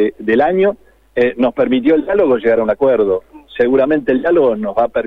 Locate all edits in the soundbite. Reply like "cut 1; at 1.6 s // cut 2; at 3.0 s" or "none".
none